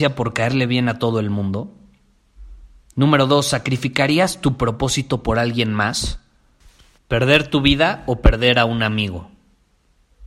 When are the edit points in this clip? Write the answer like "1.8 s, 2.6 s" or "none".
7.0 s